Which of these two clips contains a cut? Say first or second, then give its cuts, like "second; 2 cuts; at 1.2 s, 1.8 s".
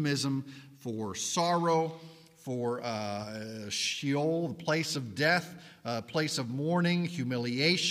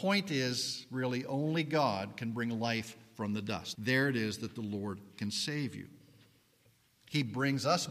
second; 1 cut; at 3.7 s